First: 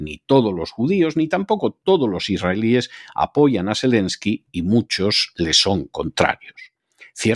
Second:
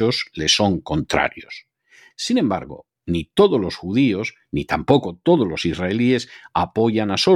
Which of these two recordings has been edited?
second; 1 cut; at 2.1 s

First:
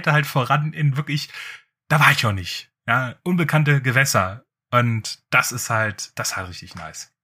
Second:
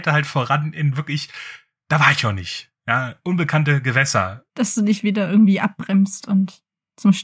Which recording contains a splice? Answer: second; 1 cut; at 4.5 s

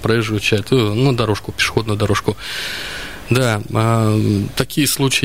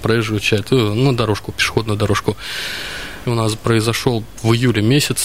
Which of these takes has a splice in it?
second; 1 cut; at 3.2 s

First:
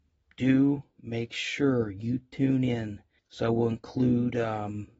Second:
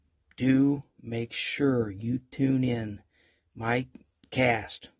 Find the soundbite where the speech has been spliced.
first; 1 cut; at 3.2 s

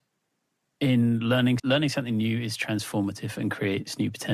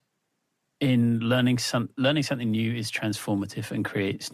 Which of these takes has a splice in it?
first; 1 cut; at 1.6 s

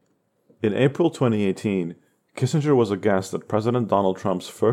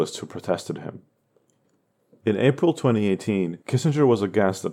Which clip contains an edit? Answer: second; 1 cut; at 3.6 s

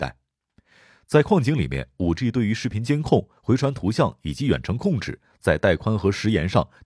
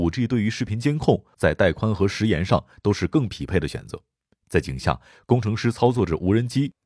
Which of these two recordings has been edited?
second; 2 cuts; at 1.3 s, 4.3 s

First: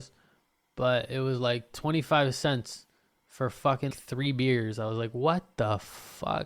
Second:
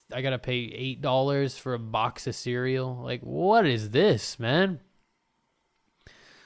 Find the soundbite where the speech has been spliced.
first; 1 cut; at 3.9 s

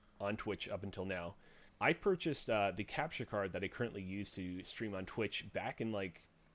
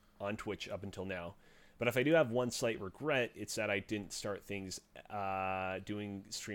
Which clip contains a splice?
first; 1 cut; at 1.7 s

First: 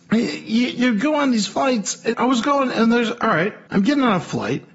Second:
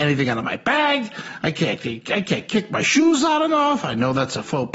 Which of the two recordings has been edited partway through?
first; 2 cuts; at 2.1 s, 3.7 s

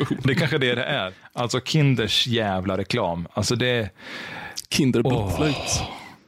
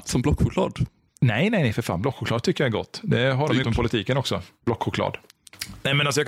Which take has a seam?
second; 1 cut; at 3.6 s

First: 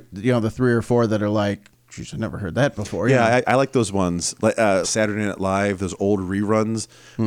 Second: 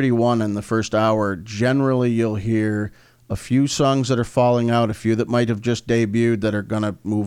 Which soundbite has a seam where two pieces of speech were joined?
first; 2 cuts; at 3.4 s, 4.8 s

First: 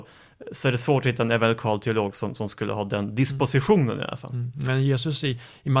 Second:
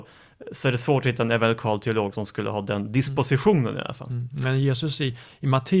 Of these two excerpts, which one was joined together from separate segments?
second; 1 cut; at 2.1 s

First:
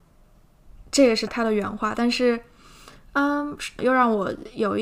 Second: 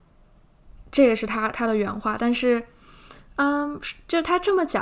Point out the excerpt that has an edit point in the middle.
first; 2 cuts; at 1.3 s, 3.8 s

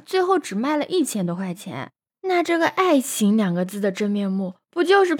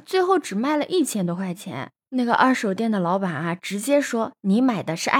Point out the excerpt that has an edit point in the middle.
first; 1 cut; at 2.1 s

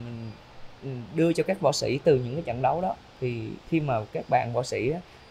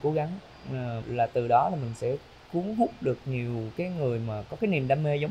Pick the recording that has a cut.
second; 1 cut; at 1.0 s

